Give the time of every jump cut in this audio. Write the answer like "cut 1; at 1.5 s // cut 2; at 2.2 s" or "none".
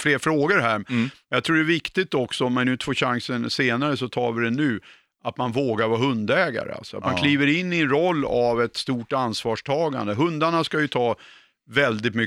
none